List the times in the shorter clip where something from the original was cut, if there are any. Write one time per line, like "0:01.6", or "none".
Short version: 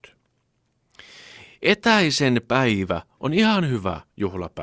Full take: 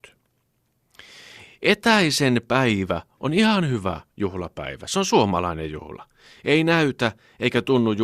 none